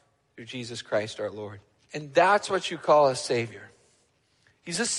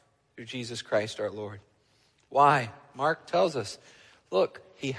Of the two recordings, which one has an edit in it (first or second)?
first